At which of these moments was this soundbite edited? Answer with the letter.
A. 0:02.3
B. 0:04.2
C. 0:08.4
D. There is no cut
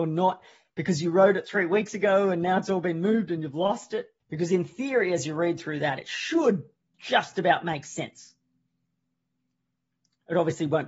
B